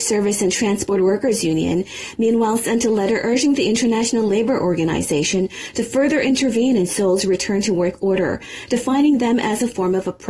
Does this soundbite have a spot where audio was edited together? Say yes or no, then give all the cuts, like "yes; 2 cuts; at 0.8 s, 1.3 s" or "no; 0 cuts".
no; 0 cuts